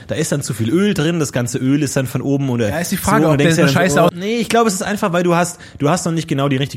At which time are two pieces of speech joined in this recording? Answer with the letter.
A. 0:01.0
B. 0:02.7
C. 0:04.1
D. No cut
C